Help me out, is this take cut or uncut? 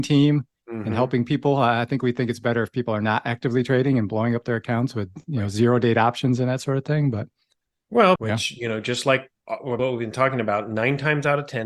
cut